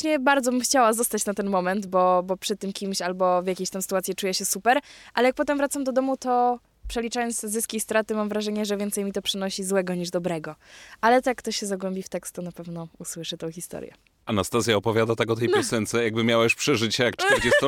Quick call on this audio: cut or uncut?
uncut